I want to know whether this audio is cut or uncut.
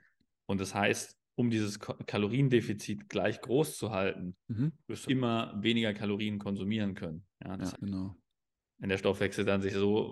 cut